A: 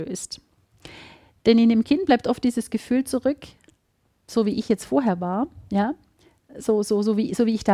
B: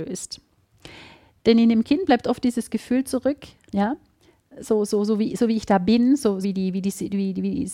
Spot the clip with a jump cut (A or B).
B